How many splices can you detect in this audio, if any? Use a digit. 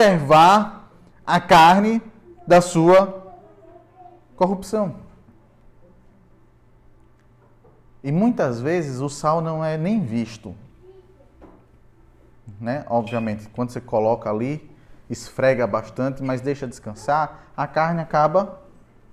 0